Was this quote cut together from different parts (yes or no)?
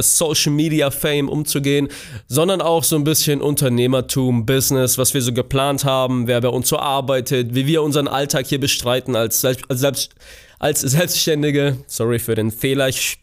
no